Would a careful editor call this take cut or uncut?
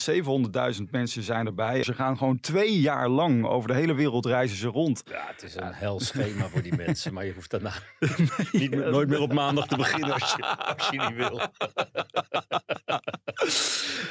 cut